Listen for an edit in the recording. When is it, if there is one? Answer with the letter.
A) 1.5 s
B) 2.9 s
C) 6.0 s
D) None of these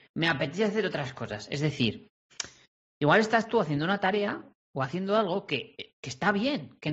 D